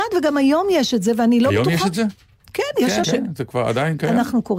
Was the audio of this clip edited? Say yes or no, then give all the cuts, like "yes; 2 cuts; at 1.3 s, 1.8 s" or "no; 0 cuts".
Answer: yes; 1 cut; at 3.0 s